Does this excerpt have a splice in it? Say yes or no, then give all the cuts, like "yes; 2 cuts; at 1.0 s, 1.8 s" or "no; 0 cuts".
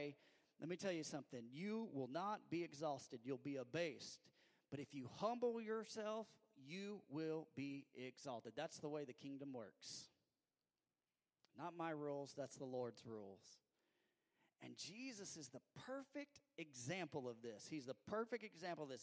no; 0 cuts